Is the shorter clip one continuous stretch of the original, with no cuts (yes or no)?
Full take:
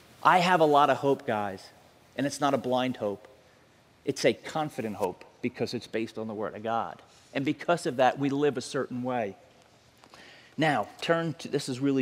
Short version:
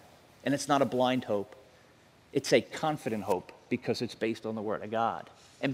yes